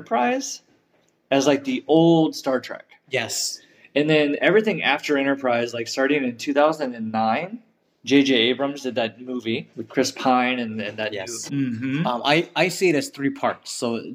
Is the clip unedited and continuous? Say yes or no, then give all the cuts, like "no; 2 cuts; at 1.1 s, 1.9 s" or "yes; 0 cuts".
no; 2 cuts; at 9.7 s, 11.5 s